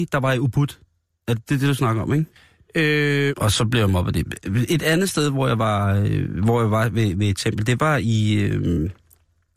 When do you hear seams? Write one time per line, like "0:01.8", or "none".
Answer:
0:03.3